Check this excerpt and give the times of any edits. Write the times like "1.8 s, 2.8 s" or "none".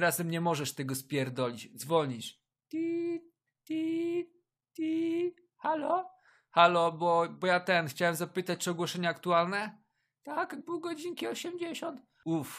10.6 s